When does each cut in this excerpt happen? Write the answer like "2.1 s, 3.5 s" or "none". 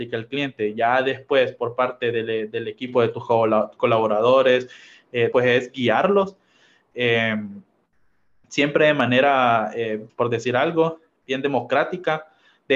5.3 s, 10.1 s